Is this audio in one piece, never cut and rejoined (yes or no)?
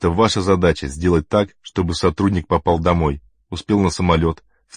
yes